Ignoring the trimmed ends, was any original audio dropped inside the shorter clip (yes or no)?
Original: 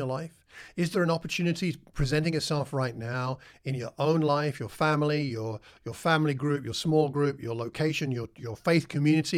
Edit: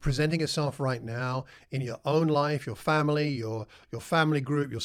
no